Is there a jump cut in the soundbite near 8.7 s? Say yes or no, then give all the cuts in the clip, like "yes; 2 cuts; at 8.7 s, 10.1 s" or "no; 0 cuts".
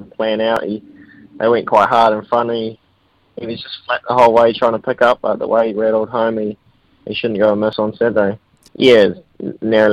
yes; 1 cut; at 8.7 s